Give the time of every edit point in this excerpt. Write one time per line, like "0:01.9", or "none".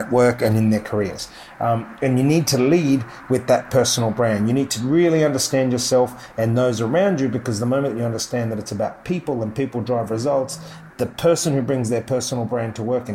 0:10.9